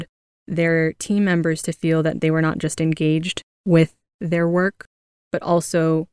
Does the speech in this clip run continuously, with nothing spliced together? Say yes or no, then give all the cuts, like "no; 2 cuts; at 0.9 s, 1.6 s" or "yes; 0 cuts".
yes; 0 cuts